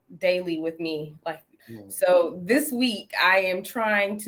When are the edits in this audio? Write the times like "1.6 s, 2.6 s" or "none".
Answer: 1.6 s